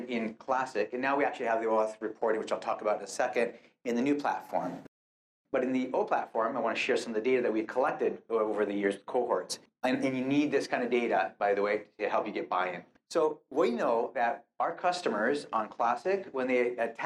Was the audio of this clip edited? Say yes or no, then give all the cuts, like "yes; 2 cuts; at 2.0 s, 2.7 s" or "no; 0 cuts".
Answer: no; 0 cuts